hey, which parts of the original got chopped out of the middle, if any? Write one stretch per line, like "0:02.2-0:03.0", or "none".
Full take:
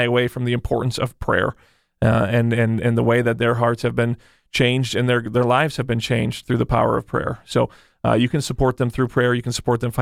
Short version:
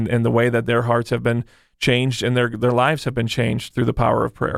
none